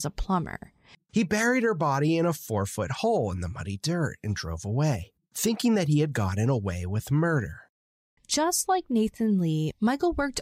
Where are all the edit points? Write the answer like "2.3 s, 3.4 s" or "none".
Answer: 0.9 s, 8.2 s